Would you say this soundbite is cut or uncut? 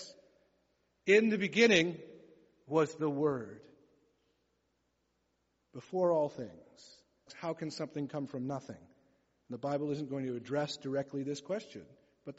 cut